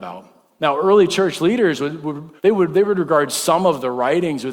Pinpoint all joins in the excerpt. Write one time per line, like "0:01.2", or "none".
0:02.4